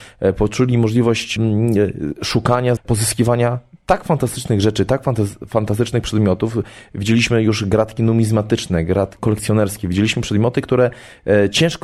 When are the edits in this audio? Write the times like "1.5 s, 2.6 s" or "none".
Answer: 2.8 s, 9.2 s